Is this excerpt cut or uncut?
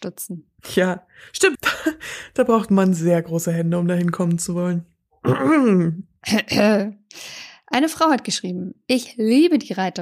cut